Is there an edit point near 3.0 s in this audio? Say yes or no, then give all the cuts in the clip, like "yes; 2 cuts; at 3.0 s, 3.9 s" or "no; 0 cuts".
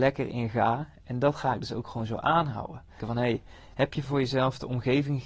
yes; 1 cut; at 3.0 s